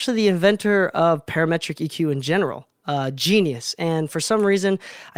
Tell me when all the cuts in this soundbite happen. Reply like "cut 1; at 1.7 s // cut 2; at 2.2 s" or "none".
none

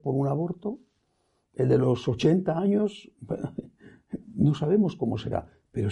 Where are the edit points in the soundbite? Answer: none

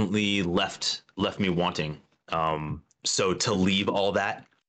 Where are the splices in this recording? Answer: cut 1; at 2.2 s

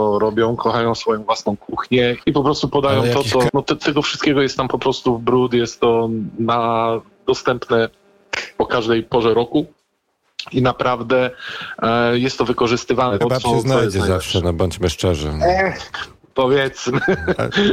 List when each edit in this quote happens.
cut 1; at 2.2 s // cut 2; at 3.5 s // cut 3; at 13.2 s

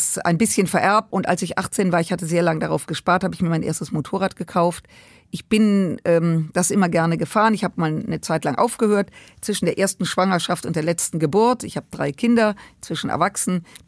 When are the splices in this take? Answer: cut 1; at 1.1 s

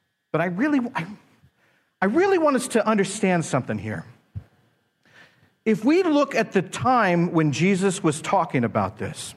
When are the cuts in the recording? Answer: none

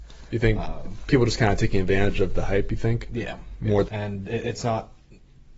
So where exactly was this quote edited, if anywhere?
cut 1; at 3.9 s

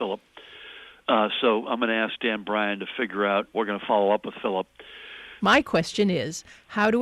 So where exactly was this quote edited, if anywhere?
cut 1; at 3.5 s // cut 2; at 5.4 s

